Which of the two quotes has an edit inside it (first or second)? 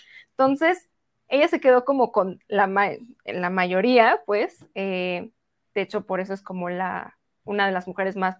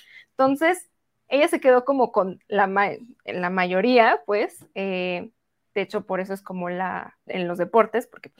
second